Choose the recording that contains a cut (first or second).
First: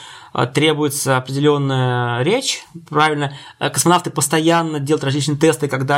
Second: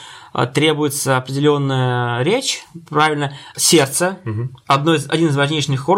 second